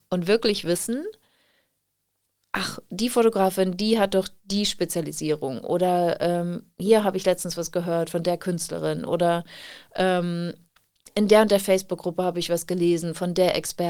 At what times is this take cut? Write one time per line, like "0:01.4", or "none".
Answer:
none